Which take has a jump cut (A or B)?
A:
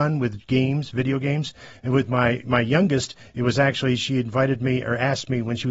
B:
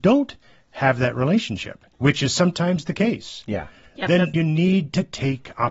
B